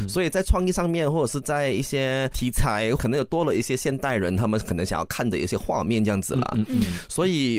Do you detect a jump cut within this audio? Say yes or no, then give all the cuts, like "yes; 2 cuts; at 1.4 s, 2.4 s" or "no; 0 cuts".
yes; 1 cut; at 3.0 s